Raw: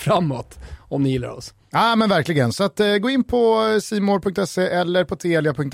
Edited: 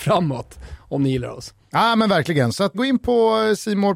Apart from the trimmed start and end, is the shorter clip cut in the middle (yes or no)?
yes